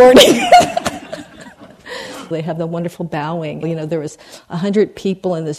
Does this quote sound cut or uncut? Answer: cut